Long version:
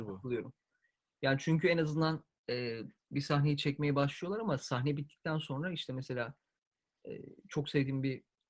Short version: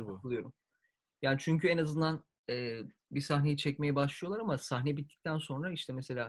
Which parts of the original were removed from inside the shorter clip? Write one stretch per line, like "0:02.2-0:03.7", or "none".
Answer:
none